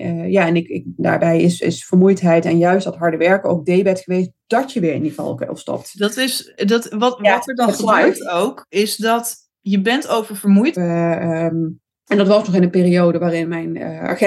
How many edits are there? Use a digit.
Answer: 2